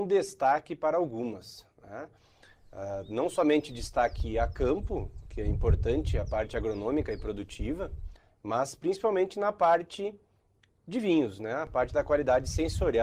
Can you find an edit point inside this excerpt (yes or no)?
no